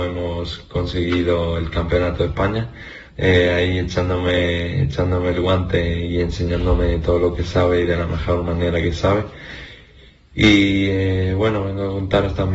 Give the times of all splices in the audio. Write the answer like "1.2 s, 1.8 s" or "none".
3.1 s